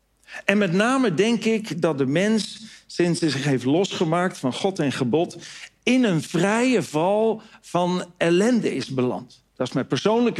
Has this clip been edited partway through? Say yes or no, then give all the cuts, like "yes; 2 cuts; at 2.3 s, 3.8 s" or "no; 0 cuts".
no; 0 cuts